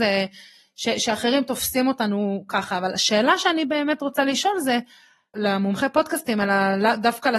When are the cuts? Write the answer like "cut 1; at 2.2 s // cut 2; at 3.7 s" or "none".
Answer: cut 1; at 5.3 s